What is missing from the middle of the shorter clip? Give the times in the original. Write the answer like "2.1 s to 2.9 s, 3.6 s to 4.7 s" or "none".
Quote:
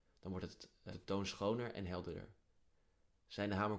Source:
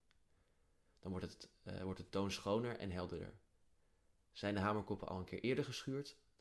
1.7 s to 2.0 s